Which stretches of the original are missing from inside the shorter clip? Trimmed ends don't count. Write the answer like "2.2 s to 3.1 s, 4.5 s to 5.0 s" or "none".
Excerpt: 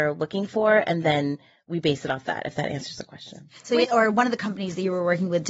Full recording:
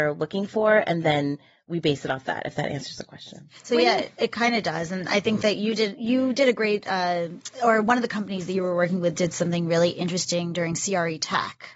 3.8 s to 7.6 s